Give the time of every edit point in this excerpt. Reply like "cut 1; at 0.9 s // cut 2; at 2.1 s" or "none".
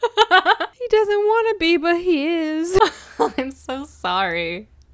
none